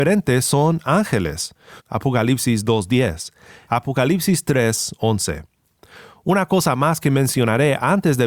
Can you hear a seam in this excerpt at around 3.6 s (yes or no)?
yes